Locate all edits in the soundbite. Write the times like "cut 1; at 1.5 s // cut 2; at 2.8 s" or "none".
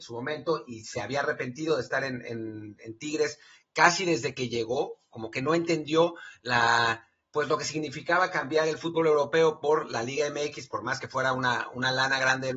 none